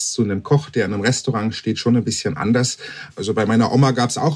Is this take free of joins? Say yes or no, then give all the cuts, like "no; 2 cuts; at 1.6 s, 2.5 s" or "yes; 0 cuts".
no; 1 cut; at 3.1 s